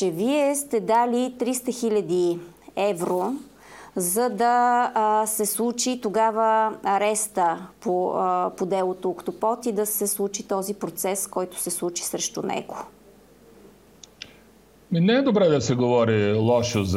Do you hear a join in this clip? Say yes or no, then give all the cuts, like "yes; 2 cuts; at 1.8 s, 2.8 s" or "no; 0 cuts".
no; 0 cuts